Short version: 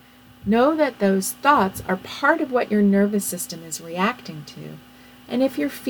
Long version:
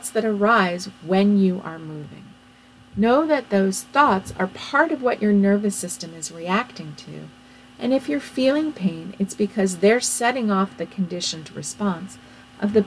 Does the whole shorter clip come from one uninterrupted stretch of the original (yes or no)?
yes